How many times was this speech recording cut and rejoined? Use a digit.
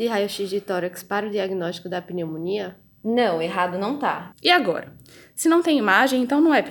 1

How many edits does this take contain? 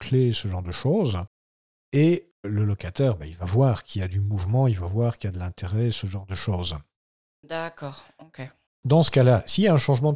2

